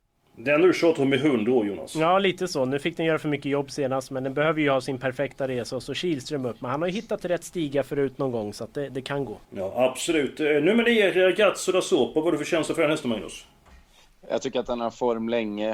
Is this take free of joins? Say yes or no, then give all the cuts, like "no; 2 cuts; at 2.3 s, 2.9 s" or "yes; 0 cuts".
no; 1 cut; at 9.4 s